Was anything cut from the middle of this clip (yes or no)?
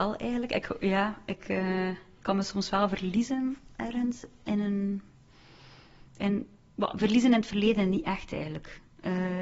yes